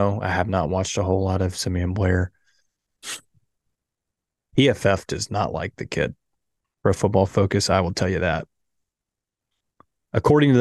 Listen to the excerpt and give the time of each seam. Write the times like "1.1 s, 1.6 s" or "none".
none